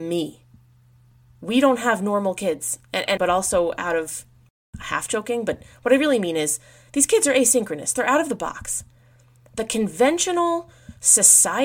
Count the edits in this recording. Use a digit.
1